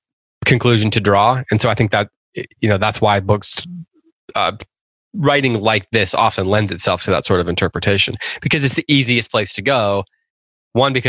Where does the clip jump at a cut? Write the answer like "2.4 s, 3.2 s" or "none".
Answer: none